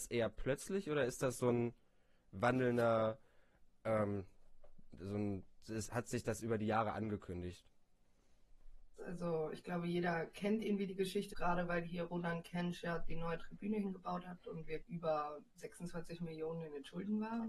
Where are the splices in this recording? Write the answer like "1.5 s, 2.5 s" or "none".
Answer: 9.0 s, 11.3 s, 14.8 s